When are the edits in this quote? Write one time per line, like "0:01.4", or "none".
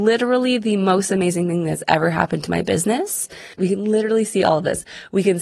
0:03.5